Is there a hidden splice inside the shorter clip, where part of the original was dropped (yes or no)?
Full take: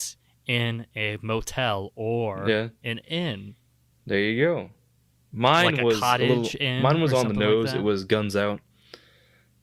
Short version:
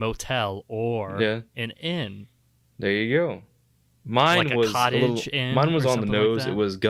no